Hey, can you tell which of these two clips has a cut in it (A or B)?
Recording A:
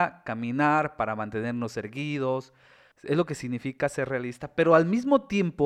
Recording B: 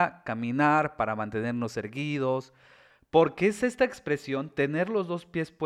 A